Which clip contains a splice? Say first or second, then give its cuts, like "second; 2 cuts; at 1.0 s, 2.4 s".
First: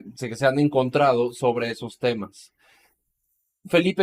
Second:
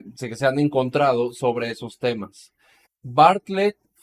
second; 1 cut; at 2.9 s